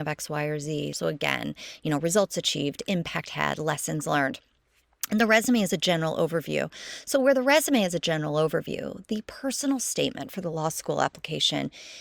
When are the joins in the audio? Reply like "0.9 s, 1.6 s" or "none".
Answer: 0.9 s